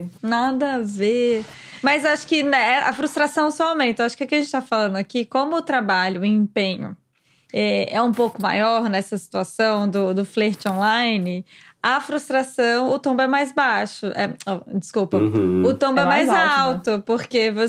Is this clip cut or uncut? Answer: uncut